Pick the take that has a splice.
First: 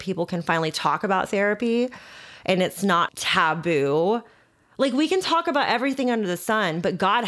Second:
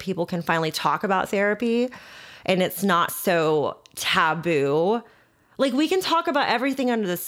first; 1 cut; at 3.1 s

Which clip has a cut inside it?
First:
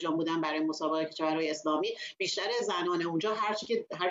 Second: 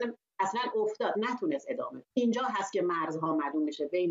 second; 1 cut; at 2.1 s

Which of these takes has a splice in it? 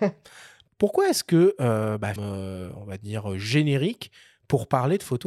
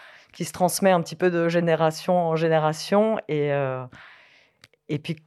first; 1 cut; at 2.2 s

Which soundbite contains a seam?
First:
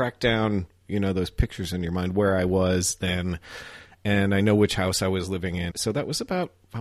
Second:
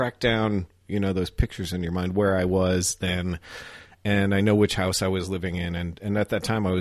first; 1 cut; at 5.7 s

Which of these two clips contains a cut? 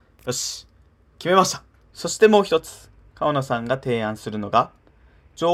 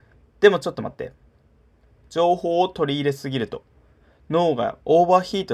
first; 1 cut; at 1.9 s

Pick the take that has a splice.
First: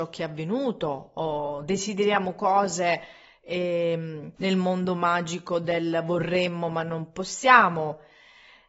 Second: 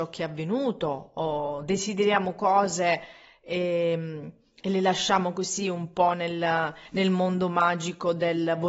first; 1 cut; at 4.4 s

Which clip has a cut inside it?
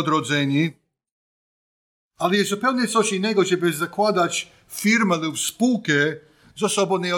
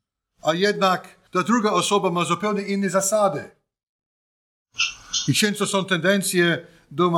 second; 1 cut; at 1.3 s

